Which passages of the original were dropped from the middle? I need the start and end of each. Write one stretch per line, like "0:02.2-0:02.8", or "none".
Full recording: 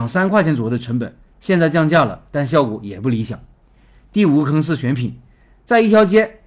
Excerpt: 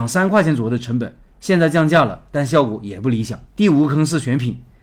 0:03.5-0:04.0